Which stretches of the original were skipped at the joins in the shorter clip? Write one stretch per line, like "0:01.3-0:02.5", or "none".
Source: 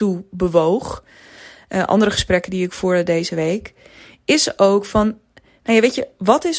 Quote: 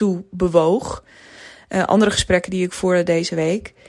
none